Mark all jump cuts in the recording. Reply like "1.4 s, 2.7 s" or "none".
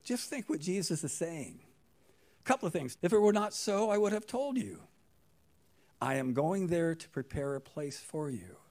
2.9 s